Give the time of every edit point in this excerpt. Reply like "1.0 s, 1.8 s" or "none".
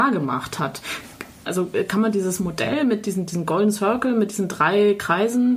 1.5 s